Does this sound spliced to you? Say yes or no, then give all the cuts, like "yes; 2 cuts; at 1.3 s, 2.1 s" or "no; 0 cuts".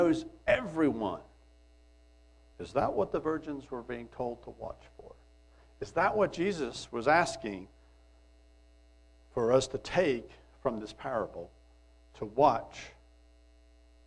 yes; 1 cut; at 2.5 s